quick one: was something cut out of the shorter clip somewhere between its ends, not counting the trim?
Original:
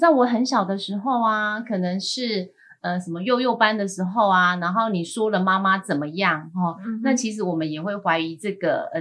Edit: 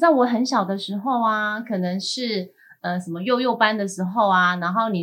no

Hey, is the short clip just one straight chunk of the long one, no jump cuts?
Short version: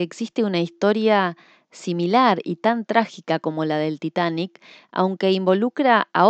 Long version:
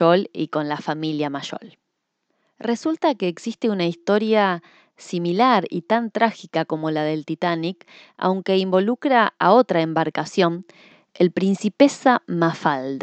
yes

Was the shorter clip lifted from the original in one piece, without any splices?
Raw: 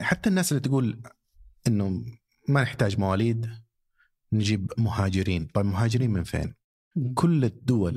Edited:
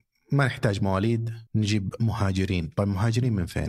no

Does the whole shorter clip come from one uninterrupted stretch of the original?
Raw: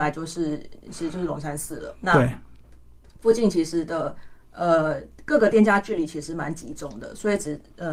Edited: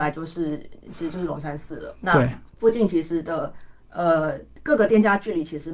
no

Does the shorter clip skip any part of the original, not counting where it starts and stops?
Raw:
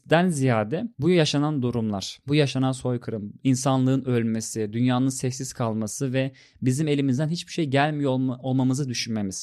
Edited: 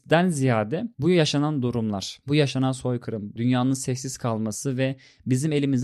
yes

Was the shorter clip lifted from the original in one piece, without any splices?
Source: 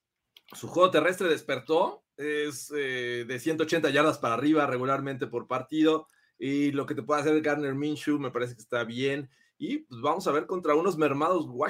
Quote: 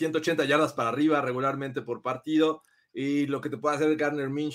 yes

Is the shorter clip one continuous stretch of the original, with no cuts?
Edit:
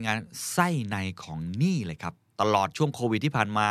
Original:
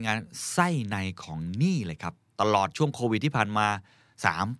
yes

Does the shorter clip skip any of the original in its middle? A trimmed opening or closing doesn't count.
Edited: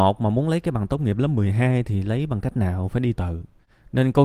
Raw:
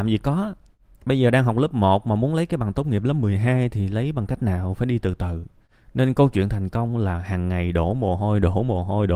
yes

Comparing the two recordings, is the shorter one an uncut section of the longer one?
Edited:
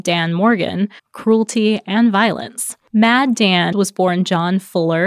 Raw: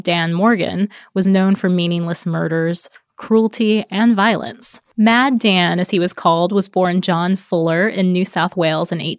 no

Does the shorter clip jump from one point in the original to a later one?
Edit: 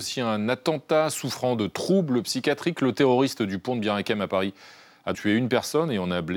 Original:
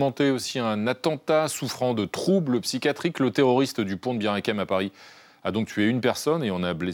yes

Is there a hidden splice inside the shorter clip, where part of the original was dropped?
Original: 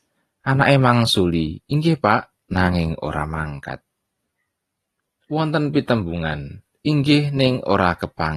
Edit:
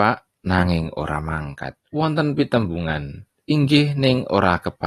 yes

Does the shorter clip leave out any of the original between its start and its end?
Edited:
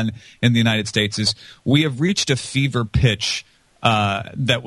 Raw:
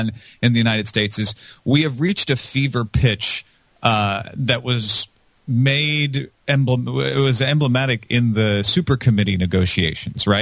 no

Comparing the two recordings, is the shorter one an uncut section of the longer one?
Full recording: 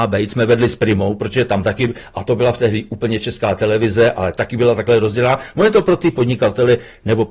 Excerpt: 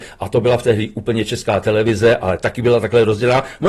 yes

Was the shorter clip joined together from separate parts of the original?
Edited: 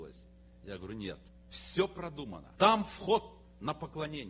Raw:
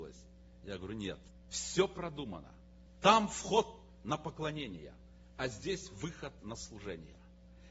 yes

